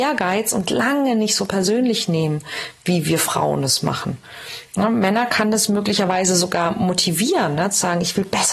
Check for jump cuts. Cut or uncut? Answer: uncut